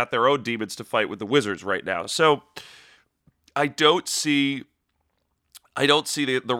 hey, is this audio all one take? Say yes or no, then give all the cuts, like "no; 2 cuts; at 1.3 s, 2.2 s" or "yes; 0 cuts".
yes; 0 cuts